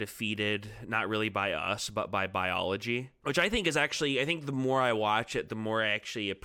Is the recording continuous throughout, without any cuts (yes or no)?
yes